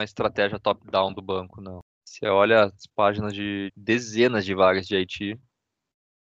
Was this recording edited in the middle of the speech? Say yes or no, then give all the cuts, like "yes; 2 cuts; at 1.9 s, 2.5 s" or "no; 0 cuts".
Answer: yes; 2 cuts; at 1.9 s, 3.7 s